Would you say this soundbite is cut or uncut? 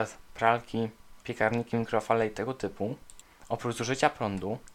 cut